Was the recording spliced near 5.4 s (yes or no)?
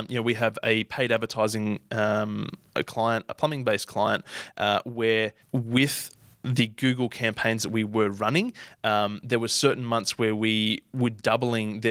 yes